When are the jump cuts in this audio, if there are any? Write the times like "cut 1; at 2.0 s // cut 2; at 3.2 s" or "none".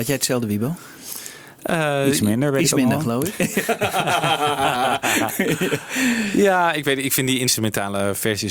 none